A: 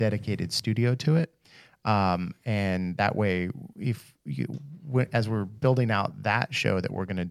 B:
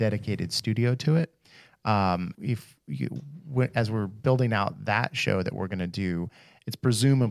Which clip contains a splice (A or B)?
B